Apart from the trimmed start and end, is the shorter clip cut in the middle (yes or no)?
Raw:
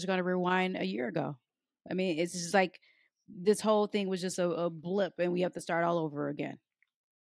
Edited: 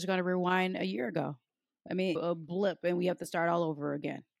yes